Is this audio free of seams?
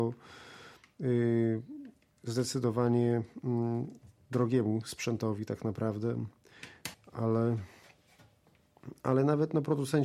no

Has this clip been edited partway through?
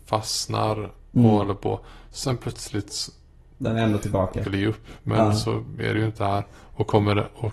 yes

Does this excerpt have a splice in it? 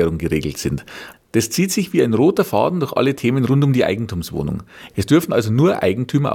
yes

